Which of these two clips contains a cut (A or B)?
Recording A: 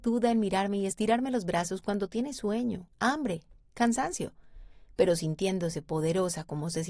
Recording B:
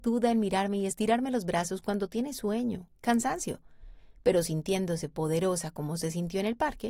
B